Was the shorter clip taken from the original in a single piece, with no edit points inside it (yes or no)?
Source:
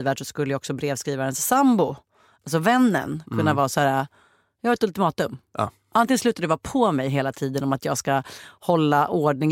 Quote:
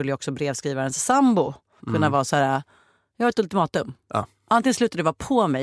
no